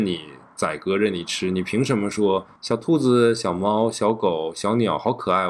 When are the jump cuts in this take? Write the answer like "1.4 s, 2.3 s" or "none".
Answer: 2.6 s